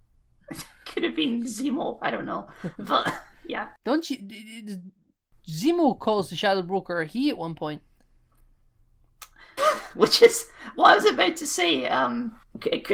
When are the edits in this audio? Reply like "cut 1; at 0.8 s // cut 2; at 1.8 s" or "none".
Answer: cut 1; at 9.6 s